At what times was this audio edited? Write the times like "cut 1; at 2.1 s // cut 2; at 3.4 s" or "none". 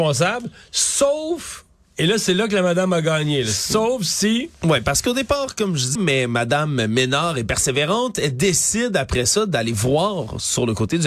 cut 1; at 6.0 s